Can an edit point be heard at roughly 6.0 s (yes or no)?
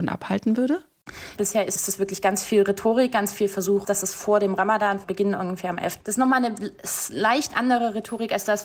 yes